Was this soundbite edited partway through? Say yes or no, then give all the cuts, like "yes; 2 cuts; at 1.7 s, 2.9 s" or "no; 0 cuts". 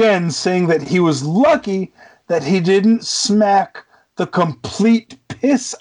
no; 0 cuts